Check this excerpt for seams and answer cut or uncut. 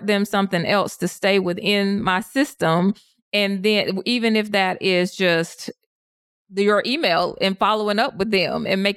uncut